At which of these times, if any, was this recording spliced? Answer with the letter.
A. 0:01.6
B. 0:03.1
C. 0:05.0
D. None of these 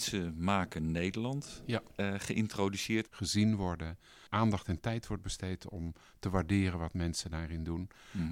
B